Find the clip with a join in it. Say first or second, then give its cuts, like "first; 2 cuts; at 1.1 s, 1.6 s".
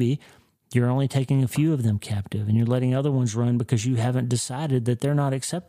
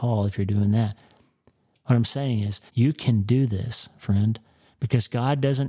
second; 1 cut; at 2.7 s